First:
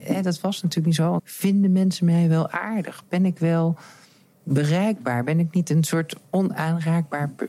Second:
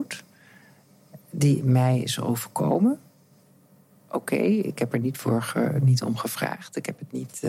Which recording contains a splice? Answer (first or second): first